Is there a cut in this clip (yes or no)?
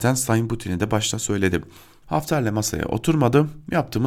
yes